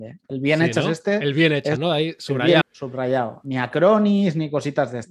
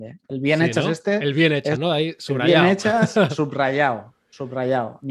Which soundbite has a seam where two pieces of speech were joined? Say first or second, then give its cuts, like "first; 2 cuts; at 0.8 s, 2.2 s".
first; 1 cut; at 2.6 s